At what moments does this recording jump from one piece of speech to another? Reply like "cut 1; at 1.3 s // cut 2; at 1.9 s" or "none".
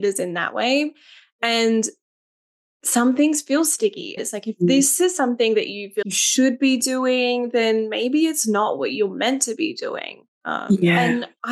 cut 1; at 4.2 s // cut 2; at 6.0 s